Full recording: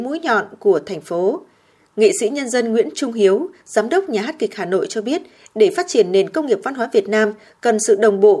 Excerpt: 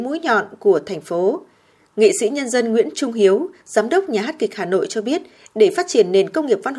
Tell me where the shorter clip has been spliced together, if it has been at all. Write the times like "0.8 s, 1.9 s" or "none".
none